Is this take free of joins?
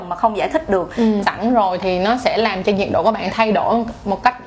no; 1 cut; at 1.2 s

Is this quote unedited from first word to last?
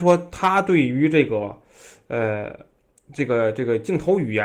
yes; 0 cuts

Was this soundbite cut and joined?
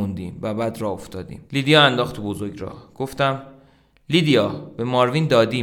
yes; 1 cut; at 1.5 s

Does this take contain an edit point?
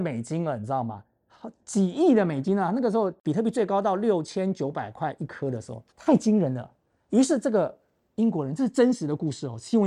yes; 1 cut; at 5.9 s

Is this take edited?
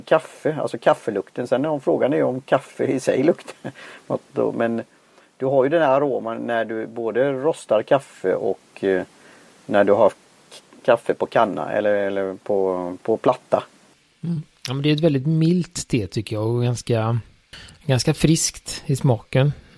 no; 0 cuts

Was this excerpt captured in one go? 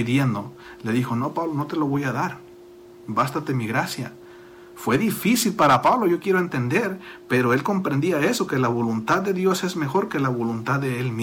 yes; 0 cuts

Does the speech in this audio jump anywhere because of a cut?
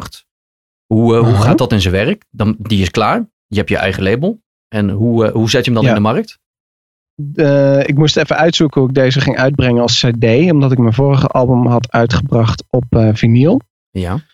no; 0 cuts

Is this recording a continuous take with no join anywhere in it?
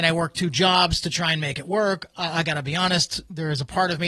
yes; 0 cuts

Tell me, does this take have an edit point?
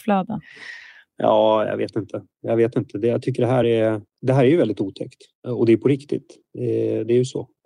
no; 0 cuts

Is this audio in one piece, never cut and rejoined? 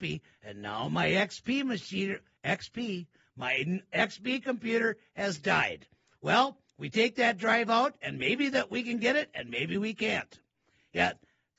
yes; 0 cuts

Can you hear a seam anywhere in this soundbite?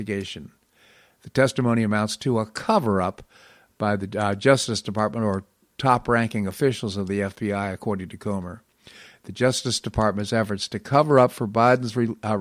no; 0 cuts

